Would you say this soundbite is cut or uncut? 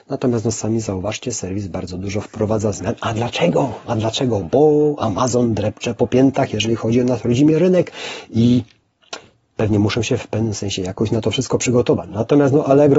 uncut